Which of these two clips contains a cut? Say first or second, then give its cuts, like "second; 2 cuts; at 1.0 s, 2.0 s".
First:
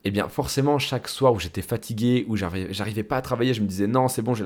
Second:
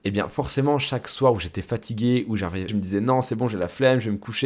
second; 1 cut; at 2.7 s